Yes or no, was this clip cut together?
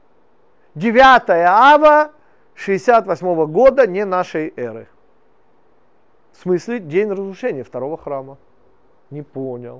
no